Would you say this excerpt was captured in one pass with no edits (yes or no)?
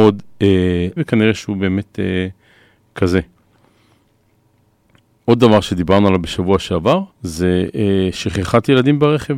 no